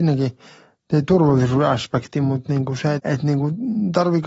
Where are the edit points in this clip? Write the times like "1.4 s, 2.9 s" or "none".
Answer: 3.0 s